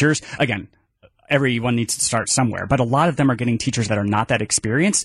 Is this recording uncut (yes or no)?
yes